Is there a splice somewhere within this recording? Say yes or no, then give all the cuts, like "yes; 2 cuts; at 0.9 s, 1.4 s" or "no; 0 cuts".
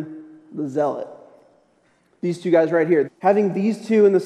yes; 1 cut; at 3.0 s